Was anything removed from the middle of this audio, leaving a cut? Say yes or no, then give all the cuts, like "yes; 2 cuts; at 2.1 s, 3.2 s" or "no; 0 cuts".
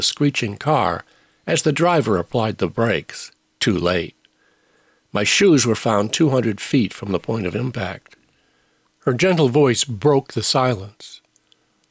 yes; 1 cut; at 8.8 s